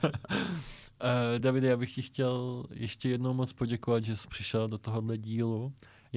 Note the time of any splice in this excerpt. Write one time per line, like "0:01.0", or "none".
none